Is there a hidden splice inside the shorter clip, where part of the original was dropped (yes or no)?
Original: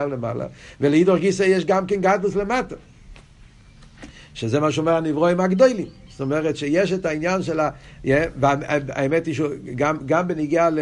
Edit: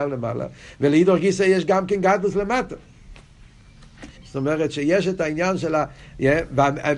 yes